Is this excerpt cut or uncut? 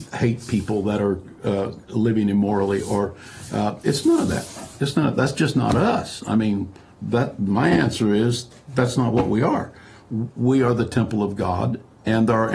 uncut